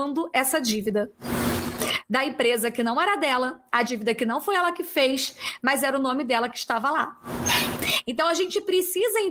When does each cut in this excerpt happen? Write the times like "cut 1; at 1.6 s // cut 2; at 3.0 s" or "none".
none